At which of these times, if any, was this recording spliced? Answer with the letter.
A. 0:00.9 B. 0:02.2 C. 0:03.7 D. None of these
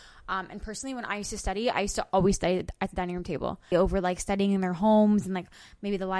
C